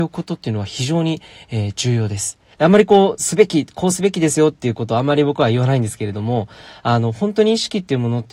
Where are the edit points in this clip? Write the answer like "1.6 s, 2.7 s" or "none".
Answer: 2.5 s